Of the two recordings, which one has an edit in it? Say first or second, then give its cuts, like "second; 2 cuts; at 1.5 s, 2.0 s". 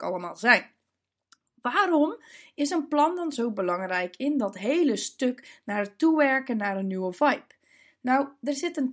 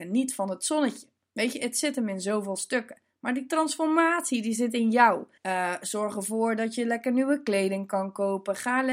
second; 1 cut; at 5.4 s